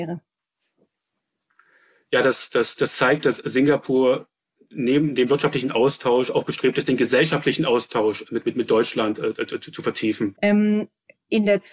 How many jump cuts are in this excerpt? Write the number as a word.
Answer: one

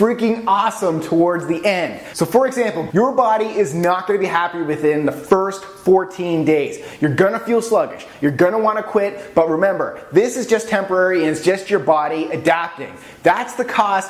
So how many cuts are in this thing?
one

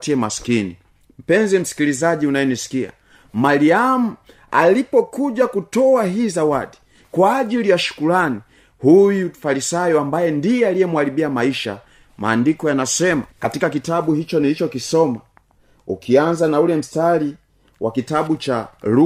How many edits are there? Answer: one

